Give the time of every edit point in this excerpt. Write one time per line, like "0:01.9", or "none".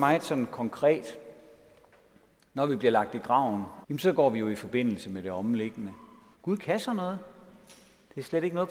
0:03.8
0:06.3